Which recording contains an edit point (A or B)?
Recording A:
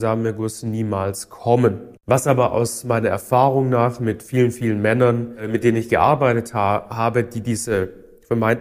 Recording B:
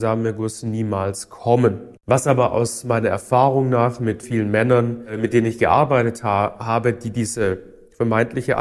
B